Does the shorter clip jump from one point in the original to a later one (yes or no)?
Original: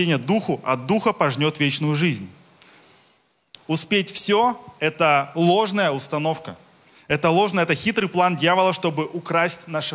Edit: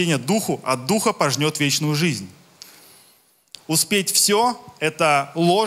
no